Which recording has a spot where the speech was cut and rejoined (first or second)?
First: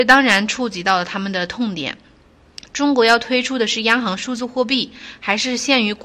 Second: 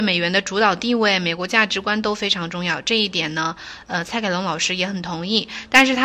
first